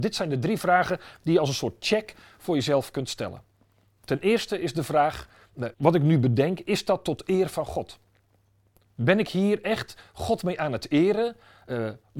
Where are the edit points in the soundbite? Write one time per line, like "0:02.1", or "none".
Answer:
0:05.7

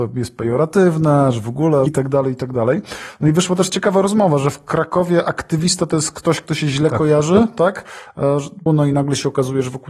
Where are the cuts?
0:01.9
0:08.7

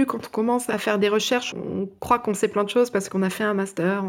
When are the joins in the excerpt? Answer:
0:01.5

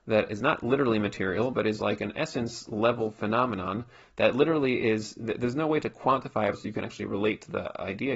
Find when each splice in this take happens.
0:06.5

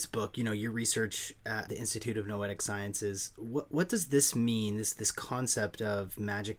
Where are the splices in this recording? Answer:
0:01.7

